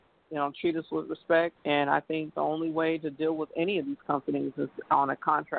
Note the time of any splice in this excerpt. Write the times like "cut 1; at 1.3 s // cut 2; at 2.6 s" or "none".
cut 1; at 1.6 s